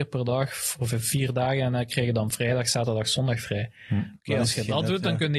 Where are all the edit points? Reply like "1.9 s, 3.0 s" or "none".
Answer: none